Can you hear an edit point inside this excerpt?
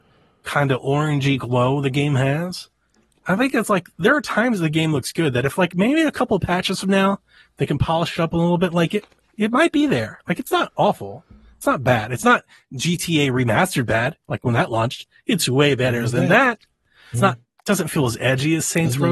yes; 1 cut; at 17.1 s

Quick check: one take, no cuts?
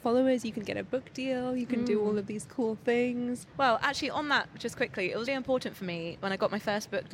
no; 1 cut; at 5.3 s

